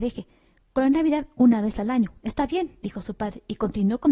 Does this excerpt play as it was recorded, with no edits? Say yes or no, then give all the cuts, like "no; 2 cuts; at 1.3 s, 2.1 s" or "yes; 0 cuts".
yes; 0 cuts